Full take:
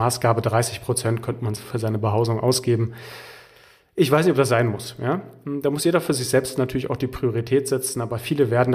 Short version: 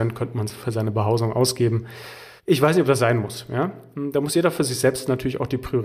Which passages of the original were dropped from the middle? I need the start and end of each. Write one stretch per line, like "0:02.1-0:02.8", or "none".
0:03.4-0:03.9